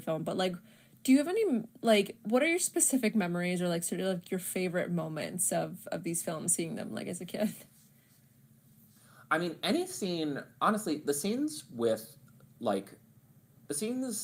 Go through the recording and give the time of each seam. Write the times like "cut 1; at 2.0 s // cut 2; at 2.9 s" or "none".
none